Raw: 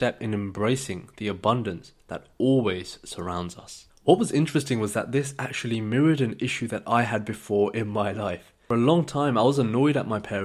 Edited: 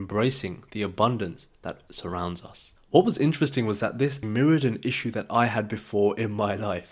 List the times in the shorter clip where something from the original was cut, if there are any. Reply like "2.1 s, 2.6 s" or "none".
1.9 s, 4.2 s